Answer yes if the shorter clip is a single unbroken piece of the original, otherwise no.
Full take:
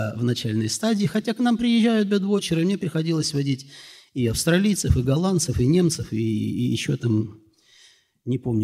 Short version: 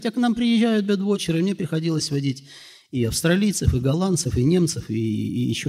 yes